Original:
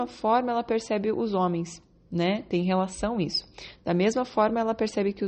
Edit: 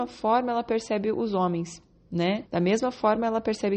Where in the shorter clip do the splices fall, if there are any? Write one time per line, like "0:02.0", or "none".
0:02.5